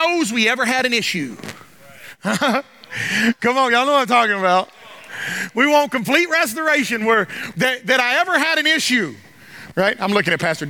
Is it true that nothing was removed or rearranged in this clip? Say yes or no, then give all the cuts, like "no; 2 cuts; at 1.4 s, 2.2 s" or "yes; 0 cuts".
no; 2 cuts; at 7.5 s, 9.7 s